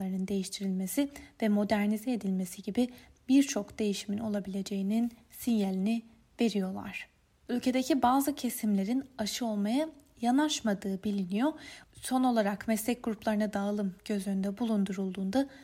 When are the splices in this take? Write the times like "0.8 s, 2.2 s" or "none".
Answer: 7.5 s, 11.8 s